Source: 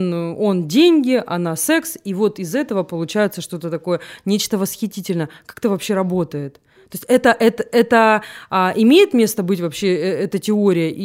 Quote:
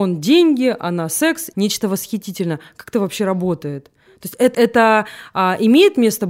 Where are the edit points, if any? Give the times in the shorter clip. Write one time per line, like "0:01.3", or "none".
0:01.5
0:04.5